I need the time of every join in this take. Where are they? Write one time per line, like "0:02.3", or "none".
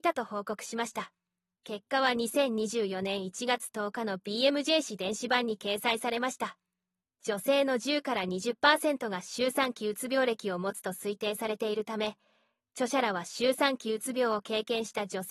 none